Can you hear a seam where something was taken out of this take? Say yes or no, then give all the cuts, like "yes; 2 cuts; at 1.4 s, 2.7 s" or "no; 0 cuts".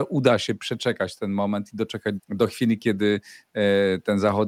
yes; 1 cut; at 2.2 s